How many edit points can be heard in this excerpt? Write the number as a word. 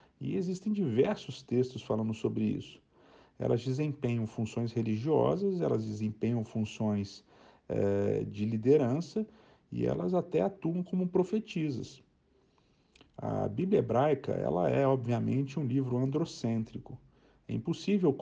zero